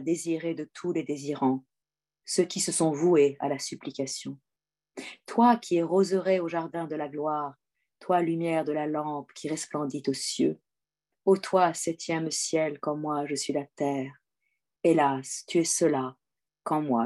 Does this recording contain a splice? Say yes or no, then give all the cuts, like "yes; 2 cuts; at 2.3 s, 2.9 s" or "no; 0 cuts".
no; 0 cuts